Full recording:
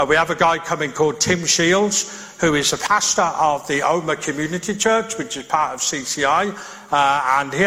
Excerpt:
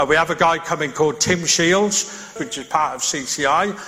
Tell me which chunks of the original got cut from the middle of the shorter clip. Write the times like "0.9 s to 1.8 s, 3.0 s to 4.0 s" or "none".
2.4 s to 5.1 s